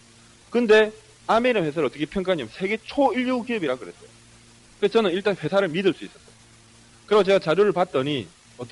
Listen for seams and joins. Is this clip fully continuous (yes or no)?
no